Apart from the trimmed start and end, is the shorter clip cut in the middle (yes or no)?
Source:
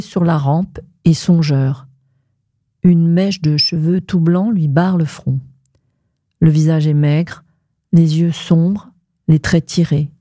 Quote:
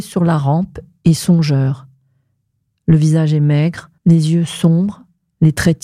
yes